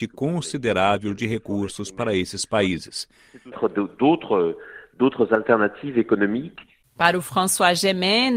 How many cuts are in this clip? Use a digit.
1